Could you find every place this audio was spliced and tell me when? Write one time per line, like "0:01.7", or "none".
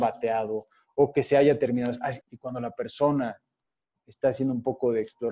0:02.2